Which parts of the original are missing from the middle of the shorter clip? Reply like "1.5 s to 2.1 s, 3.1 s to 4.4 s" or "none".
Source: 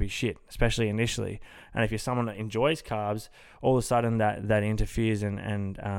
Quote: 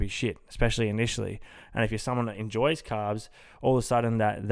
none